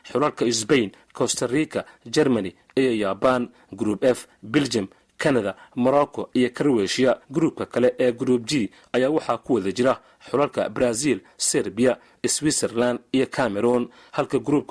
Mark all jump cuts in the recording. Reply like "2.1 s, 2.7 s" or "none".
7.2 s